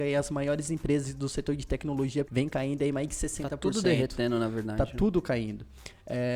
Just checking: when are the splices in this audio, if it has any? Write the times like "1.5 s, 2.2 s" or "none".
2.2 s

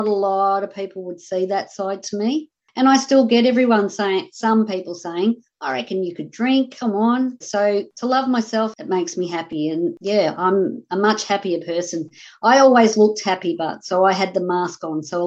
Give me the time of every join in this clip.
7.4 s

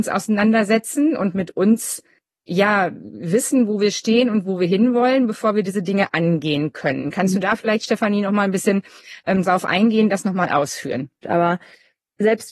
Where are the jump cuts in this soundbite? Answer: 11.2 s

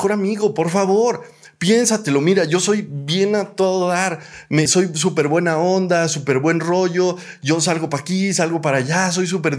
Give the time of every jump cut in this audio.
4.7 s

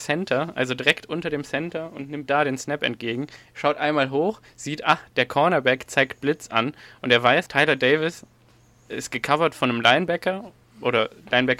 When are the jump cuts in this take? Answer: 7.5 s

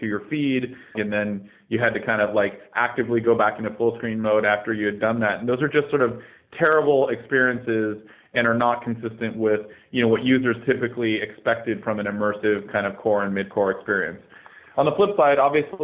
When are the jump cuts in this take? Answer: 0.9 s

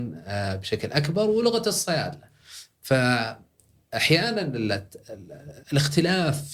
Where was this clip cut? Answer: 5.6 s

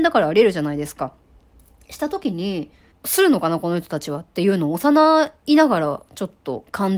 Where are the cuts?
2.9 s

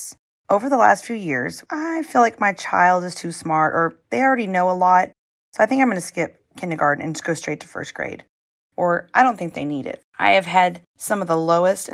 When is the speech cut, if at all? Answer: 1.7 s

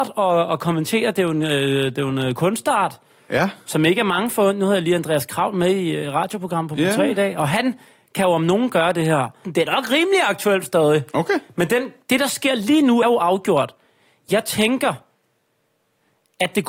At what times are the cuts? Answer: 9.4 s, 13.0 s

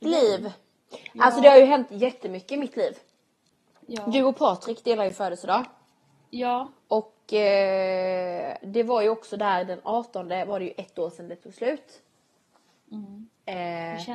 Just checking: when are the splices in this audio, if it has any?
none

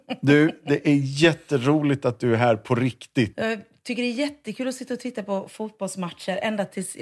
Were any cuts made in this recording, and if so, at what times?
3.3 s

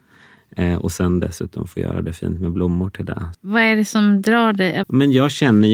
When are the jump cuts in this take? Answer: 3.3 s, 4.8 s

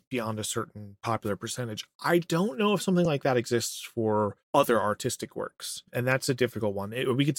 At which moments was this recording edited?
none

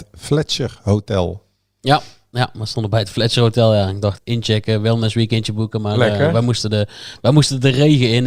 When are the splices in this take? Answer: 4.2 s

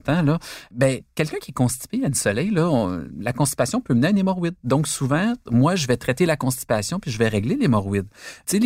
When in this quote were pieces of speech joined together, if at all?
none

